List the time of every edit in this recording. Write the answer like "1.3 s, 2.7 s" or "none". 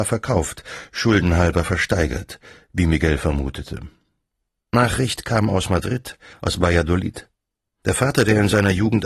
6.3 s